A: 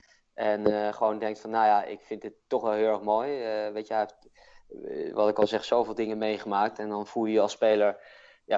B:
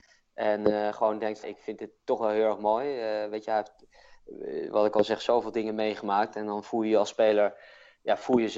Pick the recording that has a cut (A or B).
B